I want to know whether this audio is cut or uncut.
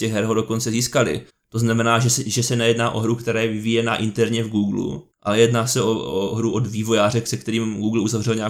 cut